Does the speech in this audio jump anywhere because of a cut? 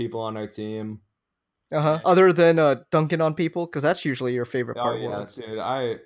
yes; 1 cut; at 2.0 s

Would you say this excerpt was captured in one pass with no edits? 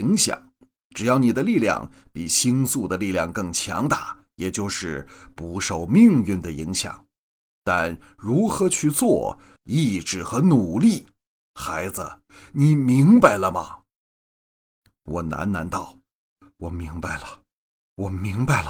no; 2 cuts; at 4.3 s, 9.6 s

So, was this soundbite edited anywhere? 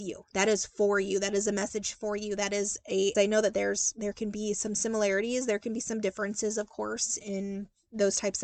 yes; 2 cuts; at 3.1 s, 7.2 s

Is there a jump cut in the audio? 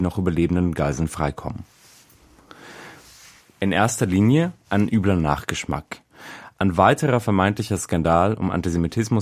yes; 1 cut; at 3.4 s

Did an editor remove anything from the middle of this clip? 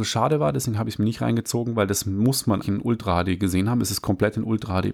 yes; 1 cut; at 2.6 s

